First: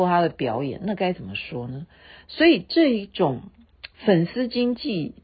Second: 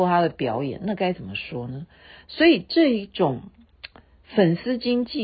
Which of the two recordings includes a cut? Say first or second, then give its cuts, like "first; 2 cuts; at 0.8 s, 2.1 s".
first; 1 cut; at 3.9 s